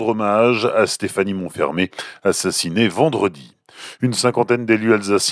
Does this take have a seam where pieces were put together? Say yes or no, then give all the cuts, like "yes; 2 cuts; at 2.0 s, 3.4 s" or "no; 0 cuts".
no; 0 cuts